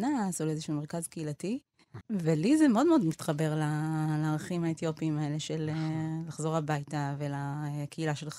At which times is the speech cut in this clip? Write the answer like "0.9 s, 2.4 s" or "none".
2.0 s